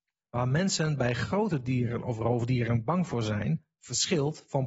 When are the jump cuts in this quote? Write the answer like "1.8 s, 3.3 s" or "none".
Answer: none